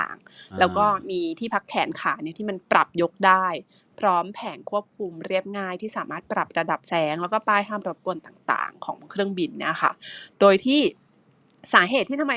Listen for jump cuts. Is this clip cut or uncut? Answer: uncut